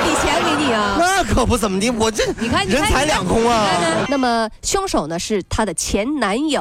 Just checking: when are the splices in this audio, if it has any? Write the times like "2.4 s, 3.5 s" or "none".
4.1 s